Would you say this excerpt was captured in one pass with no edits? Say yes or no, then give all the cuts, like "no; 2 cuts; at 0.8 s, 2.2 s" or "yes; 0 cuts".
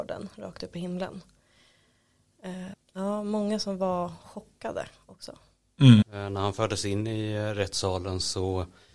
no; 2 cuts; at 2.7 s, 6.0 s